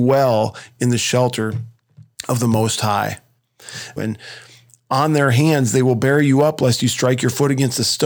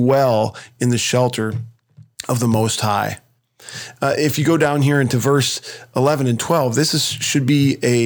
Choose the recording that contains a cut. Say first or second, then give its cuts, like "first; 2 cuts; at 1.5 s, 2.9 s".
first; 1 cut; at 4.0 s